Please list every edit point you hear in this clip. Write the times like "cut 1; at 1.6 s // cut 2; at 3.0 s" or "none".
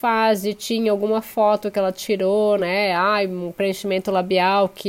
none